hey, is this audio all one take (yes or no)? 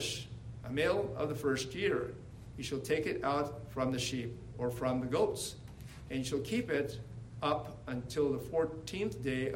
yes